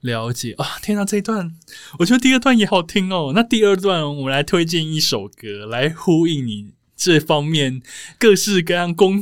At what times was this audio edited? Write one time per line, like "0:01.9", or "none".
0:02.7

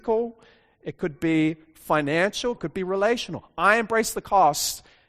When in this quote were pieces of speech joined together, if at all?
0:02.5

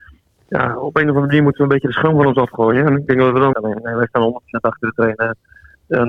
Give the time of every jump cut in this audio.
0:03.5

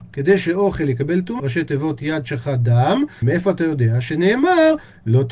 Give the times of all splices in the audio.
0:01.4
0:03.2

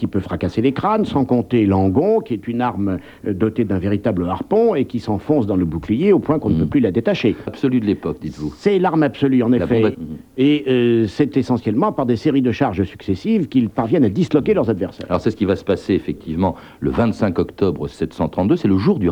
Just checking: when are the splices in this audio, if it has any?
0:07.5
0:09.9

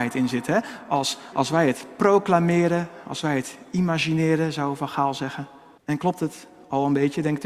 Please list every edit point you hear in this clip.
0:01.3
0:05.8

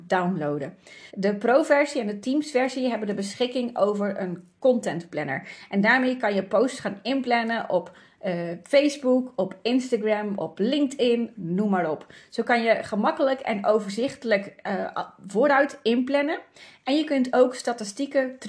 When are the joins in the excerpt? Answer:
0:01.1
0:11.4

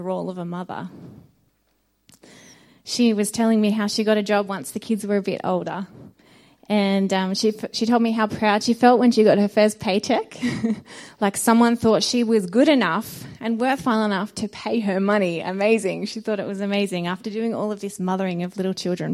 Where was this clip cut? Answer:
none

